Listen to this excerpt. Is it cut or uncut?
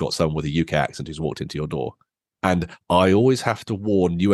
cut